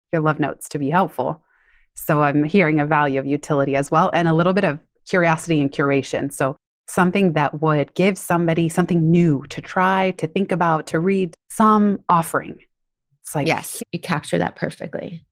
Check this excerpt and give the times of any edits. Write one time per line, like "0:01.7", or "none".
0:11.3
0:13.8